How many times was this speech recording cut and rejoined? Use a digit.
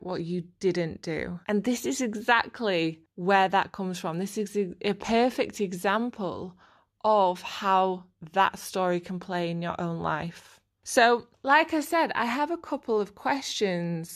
1